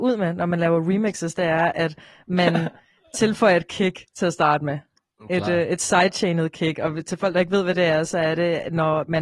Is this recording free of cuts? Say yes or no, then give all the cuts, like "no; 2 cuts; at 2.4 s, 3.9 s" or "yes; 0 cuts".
yes; 0 cuts